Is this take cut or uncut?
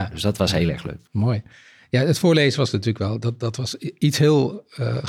uncut